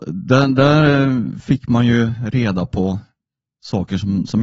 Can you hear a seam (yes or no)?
no